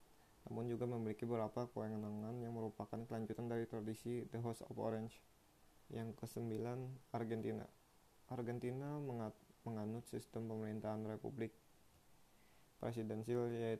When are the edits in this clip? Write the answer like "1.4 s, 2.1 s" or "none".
5.8 s